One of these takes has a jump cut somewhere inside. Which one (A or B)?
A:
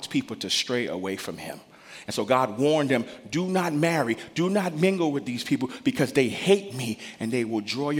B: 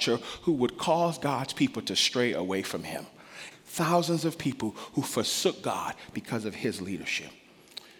B